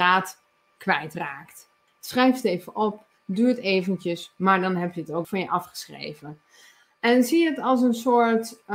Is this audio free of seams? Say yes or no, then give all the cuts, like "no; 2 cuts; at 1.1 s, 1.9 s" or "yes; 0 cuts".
no; 2 cuts; at 1.9 s, 5.2 s